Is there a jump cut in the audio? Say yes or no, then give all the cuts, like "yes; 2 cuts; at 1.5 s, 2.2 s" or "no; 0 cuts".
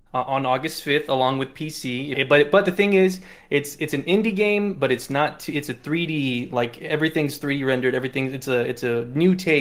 yes; 1 cut; at 2.1 s